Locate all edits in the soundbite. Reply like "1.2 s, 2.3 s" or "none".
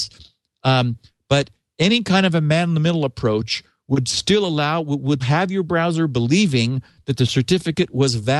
5.2 s